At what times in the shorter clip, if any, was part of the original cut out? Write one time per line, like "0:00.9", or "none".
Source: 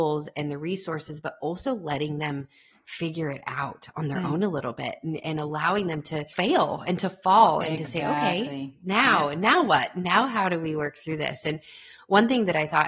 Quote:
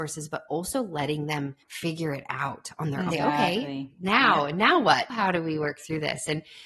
0:01.6
0:03.1
0:05.1